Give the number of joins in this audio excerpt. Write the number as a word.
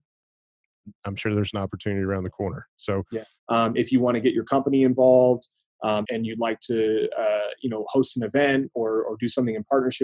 two